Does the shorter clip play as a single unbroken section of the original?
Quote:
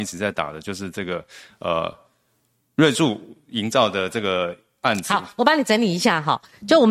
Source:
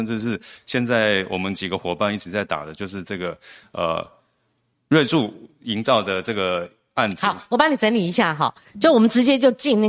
yes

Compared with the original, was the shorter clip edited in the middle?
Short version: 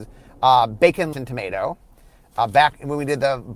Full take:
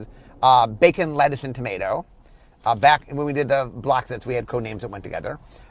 yes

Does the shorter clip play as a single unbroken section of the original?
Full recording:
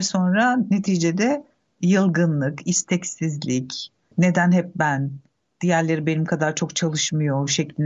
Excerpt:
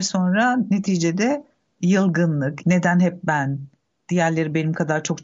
no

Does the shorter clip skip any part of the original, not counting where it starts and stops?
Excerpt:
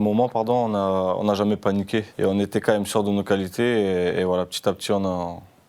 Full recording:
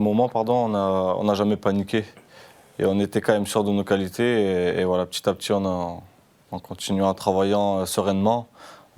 yes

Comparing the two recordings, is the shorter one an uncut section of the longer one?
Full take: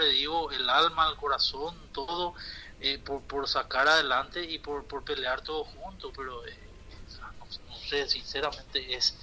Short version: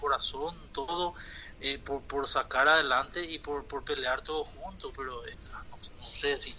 no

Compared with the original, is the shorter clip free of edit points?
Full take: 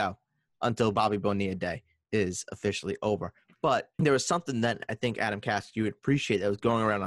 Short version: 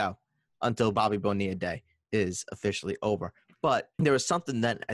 yes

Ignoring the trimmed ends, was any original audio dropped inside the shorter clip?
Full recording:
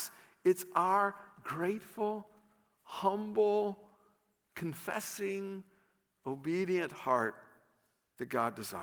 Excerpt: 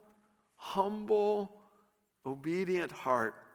yes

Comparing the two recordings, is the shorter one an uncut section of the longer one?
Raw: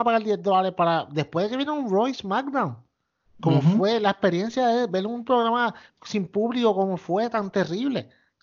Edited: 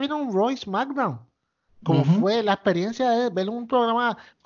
yes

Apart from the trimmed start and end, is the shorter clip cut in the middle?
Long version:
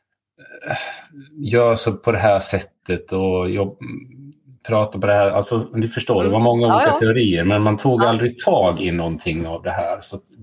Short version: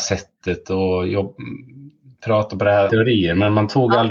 yes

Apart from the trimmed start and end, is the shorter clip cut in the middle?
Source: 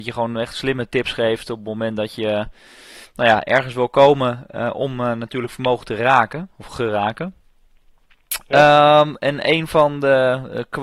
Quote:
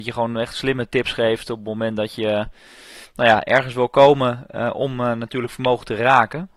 no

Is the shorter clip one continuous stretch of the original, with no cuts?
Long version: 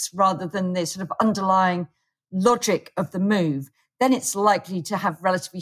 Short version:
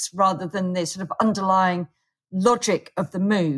yes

